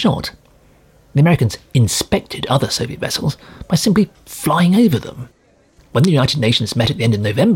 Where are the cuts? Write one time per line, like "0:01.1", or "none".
0:05.8